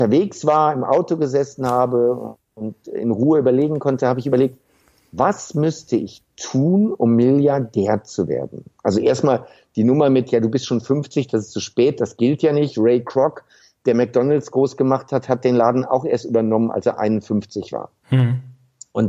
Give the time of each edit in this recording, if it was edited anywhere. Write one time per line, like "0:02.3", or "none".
none